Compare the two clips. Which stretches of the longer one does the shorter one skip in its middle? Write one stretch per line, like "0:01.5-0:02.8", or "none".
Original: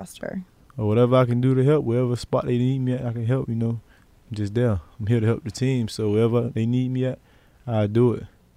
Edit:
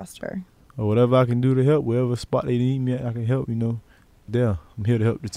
0:04.3-0:04.5